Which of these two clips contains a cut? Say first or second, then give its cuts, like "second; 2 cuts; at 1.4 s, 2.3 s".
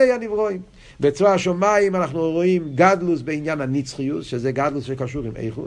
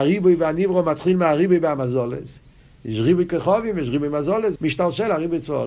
second; 1 cut; at 4.6 s